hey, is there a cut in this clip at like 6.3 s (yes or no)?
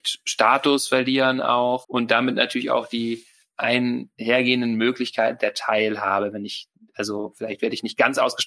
no